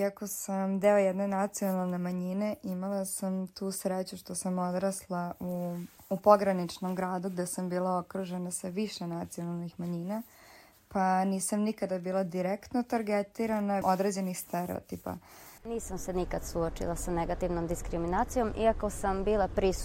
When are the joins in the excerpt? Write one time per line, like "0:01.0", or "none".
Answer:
0:13.8
0:15.6